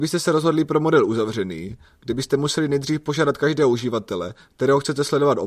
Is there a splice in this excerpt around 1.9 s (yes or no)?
no